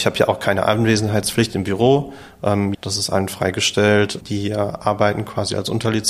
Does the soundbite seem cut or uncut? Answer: cut